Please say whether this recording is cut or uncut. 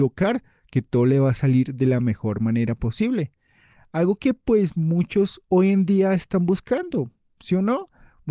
uncut